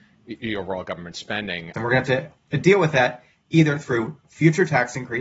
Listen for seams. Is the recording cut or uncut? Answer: cut